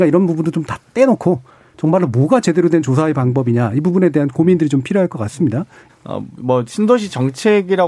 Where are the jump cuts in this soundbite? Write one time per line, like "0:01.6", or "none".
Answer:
0:05.9